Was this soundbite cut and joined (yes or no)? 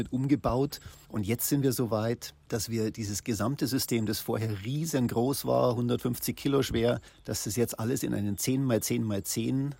no